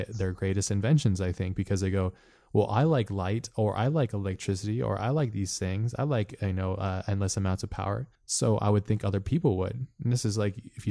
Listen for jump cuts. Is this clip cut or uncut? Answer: cut